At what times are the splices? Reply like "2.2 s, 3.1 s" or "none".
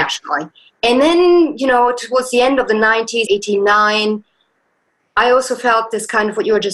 3.3 s